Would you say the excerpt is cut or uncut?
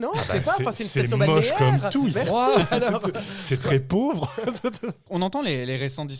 cut